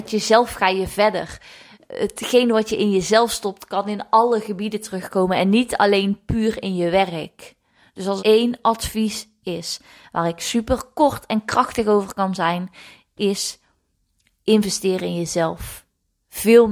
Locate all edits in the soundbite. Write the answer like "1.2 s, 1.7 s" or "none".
8.2 s